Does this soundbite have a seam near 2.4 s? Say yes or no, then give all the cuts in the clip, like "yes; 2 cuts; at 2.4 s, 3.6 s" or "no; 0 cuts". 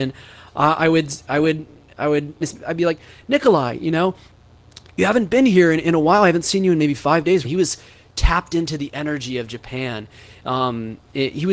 yes; 2 cuts; at 2.4 s, 7.4 s